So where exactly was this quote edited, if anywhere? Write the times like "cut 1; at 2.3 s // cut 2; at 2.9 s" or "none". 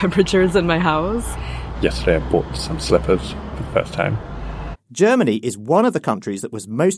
cut 1; at 1.7 s // cut 2; at 4.7 s

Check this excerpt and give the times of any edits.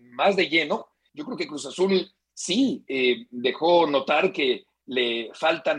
cut 1; at 1.1 s

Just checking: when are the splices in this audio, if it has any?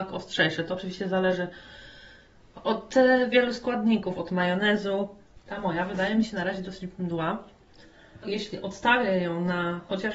cut 1; at 4.1 s // cut 2; at 8.2 s

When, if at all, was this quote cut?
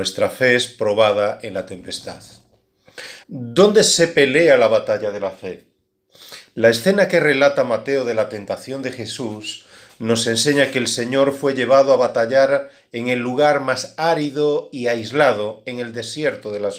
cut 1; at 3.2 s

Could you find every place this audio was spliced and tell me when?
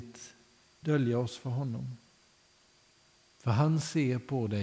none

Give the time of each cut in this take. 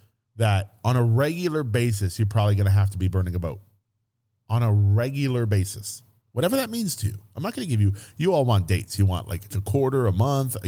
cut 1; at 9.5 s

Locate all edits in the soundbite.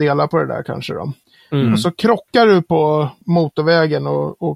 none

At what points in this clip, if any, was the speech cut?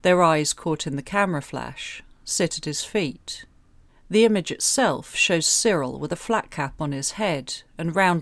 cut 1; at 3.9 s

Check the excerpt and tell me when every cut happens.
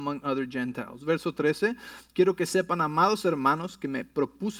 none

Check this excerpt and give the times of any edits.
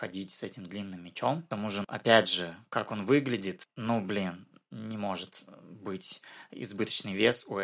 cut 1; at 1.8 s

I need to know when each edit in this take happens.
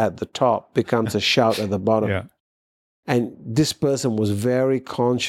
none

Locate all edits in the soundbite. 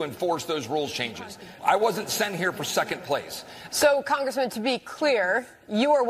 cut 1; at 1.6 s // cut 2; at 3.7 s

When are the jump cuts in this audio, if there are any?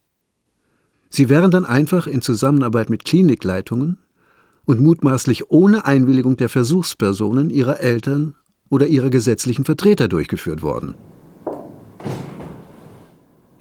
cut 1; at 0.9 s

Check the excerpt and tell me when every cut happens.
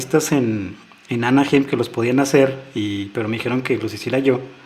none

